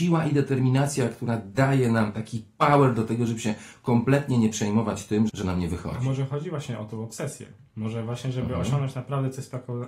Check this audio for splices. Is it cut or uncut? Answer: cut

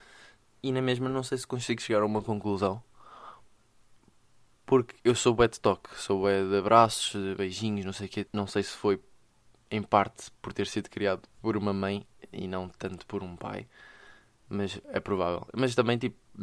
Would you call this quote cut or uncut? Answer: cut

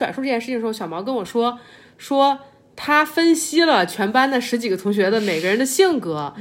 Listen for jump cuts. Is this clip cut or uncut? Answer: uncut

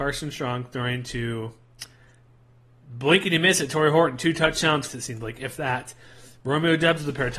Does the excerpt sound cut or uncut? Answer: cut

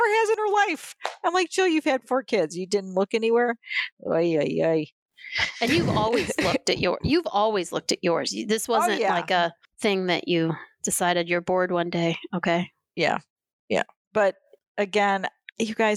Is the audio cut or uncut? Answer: uncut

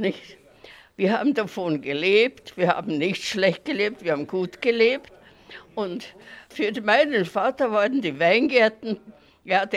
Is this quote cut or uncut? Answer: uncut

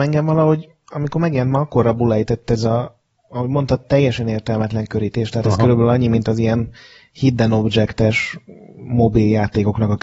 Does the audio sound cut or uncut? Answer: uncut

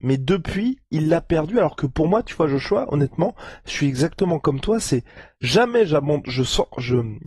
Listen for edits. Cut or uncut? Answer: uncut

